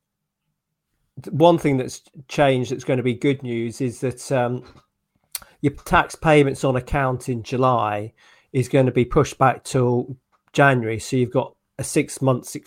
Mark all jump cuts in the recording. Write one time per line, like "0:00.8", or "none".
none